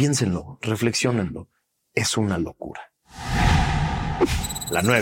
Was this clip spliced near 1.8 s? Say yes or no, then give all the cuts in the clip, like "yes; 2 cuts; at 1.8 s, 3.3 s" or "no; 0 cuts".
no; 0 cuts